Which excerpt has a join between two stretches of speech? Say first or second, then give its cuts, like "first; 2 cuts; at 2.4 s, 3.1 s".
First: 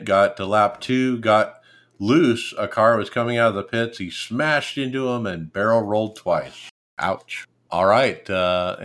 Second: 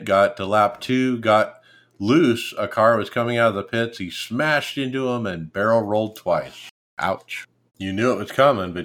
second; 1 cut; at 7.7 s